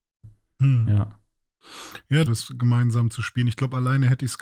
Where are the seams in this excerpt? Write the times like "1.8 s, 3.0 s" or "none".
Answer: 2.3 s